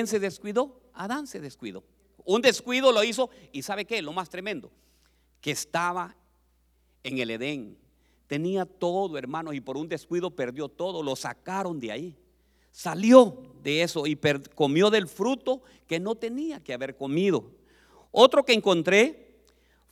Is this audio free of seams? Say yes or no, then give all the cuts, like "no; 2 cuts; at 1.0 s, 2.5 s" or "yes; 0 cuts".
yes; 0 cuts